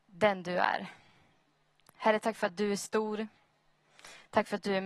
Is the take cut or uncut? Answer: uncut